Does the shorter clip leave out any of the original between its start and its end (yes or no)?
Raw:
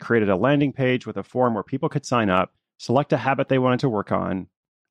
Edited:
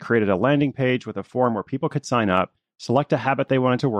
no